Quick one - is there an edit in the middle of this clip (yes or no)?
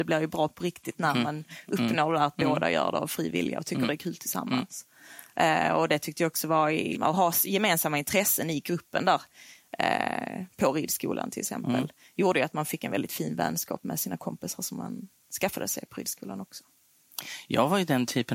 yes